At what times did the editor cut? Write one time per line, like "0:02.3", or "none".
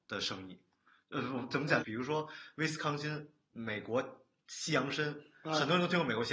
0:01.8